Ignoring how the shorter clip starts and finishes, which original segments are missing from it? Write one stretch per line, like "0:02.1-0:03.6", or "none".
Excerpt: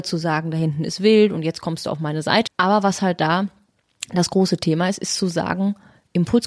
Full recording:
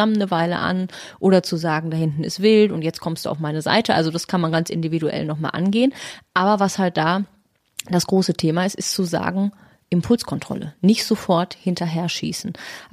0:03.9-0:06.2